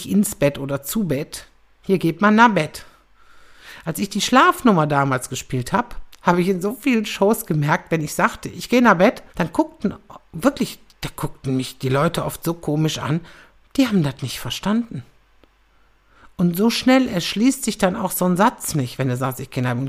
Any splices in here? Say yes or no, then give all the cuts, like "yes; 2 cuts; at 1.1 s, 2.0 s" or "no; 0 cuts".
yes; 1 cut; at 9.3 s